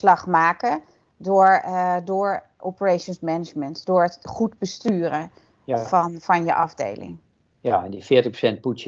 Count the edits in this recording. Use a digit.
0